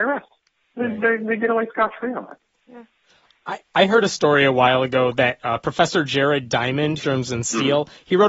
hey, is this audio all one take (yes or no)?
no